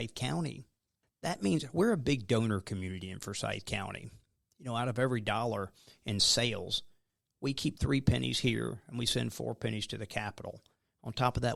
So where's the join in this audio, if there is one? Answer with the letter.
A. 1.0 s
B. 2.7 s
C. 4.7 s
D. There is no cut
A